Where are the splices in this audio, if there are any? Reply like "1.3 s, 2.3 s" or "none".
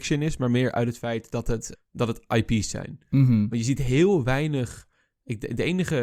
1.7 s